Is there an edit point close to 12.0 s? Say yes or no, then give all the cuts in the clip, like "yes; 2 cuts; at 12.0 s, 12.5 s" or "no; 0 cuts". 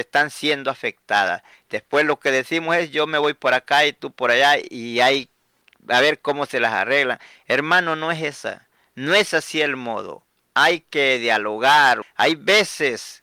yes; 2 cuts; at 1.5 s, 12.0 s